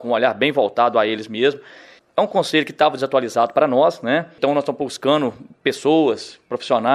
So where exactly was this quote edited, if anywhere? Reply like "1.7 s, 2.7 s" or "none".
none